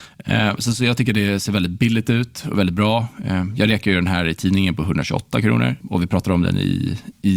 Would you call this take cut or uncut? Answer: cut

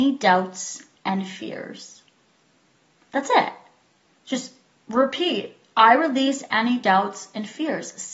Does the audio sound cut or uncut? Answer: cut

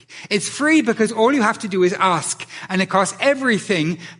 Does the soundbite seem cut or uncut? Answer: uncut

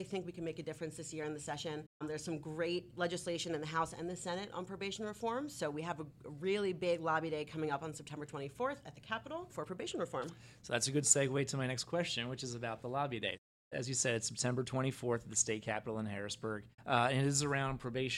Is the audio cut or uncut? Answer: uncut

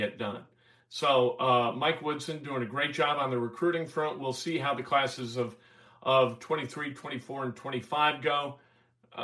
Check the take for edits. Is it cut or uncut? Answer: uncut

